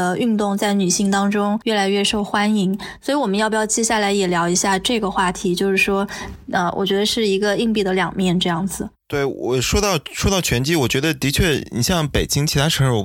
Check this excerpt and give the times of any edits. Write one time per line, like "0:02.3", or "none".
none